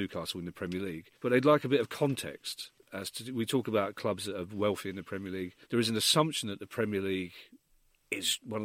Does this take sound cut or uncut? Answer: cut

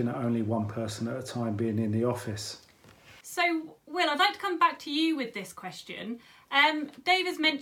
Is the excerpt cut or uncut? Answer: uncut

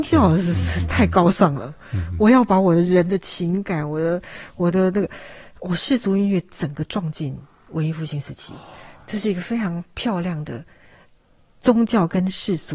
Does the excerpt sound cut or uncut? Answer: uncut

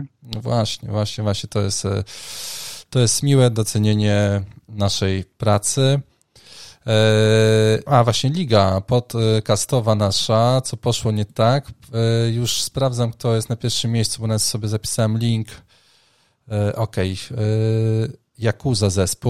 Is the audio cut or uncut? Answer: cut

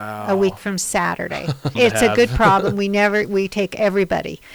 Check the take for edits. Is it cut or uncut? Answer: cut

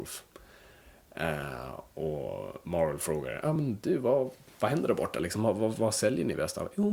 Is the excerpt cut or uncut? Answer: uncut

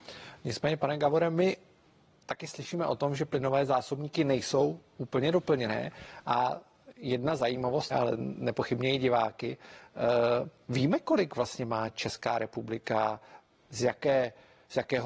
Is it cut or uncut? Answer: cut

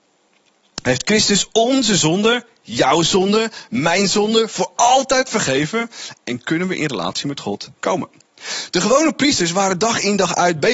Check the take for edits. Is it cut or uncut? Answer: uncut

